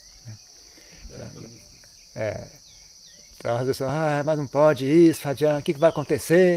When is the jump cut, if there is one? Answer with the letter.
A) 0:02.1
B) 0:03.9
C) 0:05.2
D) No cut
D